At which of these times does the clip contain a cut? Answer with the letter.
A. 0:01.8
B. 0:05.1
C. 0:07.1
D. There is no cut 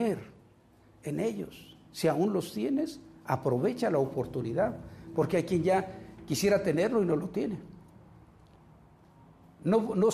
D